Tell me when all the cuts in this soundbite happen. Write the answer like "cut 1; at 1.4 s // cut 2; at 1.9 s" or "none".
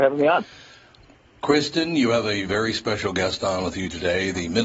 none